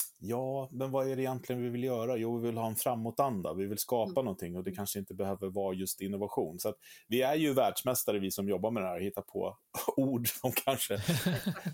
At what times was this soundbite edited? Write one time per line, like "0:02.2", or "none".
none